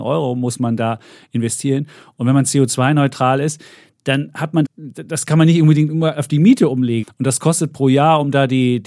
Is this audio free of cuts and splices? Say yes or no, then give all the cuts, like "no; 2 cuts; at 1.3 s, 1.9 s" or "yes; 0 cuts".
no; 2 cuts; at 4.6 s, 7.0 s